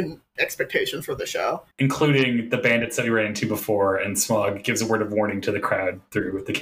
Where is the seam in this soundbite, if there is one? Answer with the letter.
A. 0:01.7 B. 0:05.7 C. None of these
A